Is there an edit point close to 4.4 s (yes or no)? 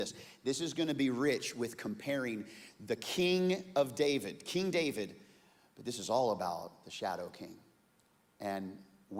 no